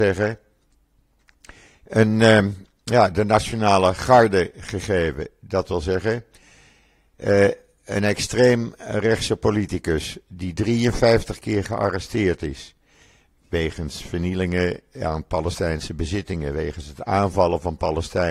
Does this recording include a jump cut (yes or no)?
no